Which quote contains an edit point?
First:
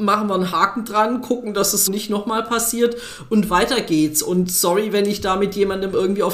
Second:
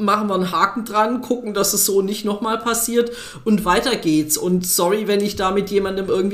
first; 1 cut; at 1.9 s

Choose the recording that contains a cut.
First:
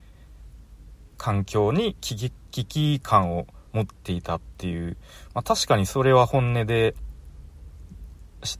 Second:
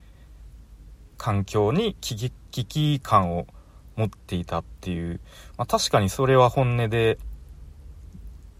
first; 1 cut; at 3.7 s

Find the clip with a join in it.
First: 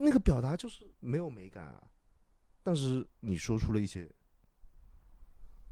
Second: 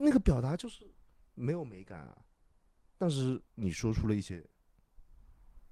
first; 1 cut; at 0.9 s

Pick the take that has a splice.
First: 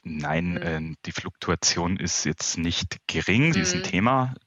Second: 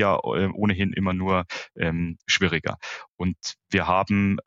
first; 1 cut; at 3.5 s

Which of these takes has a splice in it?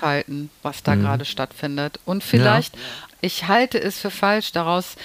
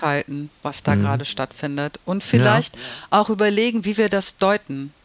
first; 1 cut; at 3.1 s

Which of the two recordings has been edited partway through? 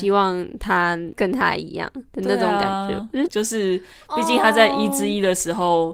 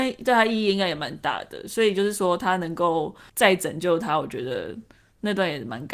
first; 1 cut; at 3.3 s

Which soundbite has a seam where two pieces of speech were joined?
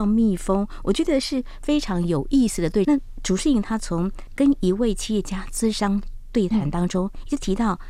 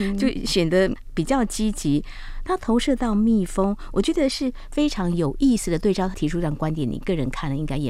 first; 1 cut; at 2.8 s

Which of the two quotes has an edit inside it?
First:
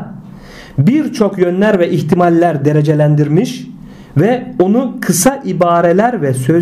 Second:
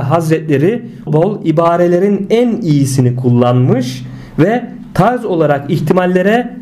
second; 1 cut; at 1.1 s

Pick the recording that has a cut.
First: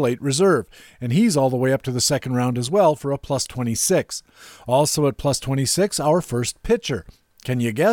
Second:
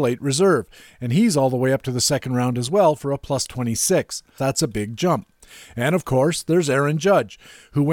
second; 1 cut; at 4.4 s

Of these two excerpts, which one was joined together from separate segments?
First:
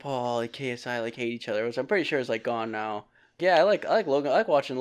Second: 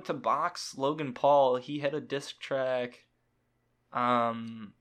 first; 1 cut; at 3.4 s

